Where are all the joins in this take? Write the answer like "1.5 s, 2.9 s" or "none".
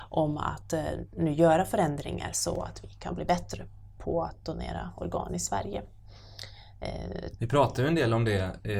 7.4 s